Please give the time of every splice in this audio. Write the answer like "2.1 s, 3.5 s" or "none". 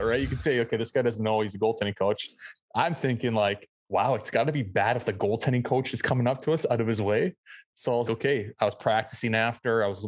3.8 s, 8.0 s